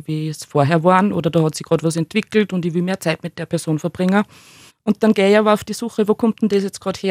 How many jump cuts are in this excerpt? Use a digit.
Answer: 1